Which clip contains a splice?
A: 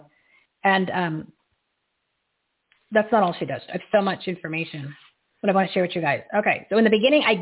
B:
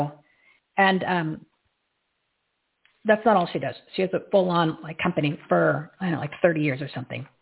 A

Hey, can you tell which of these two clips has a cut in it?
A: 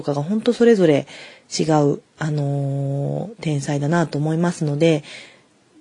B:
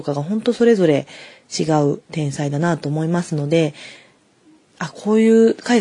B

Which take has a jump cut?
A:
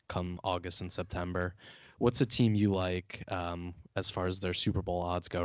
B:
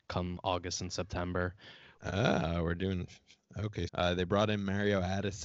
B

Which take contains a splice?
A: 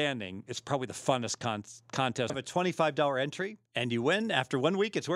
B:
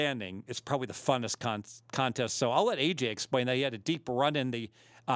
A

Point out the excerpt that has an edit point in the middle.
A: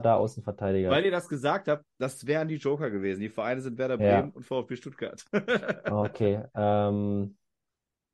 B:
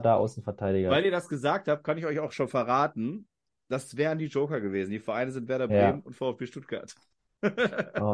A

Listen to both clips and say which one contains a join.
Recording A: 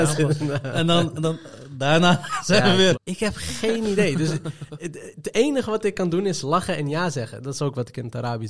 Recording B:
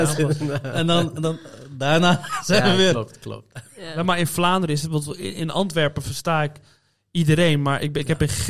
A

